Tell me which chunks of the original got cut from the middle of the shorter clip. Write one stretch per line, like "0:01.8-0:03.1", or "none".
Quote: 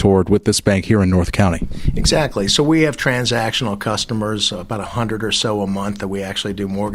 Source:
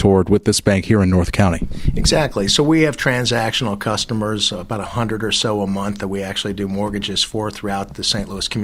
none